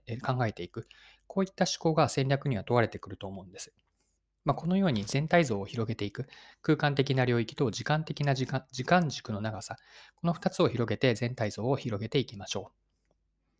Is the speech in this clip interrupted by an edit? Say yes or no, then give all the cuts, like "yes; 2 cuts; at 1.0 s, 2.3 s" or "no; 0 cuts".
no; 0 cuts